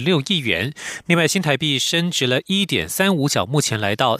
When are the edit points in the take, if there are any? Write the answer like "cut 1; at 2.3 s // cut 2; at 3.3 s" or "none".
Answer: none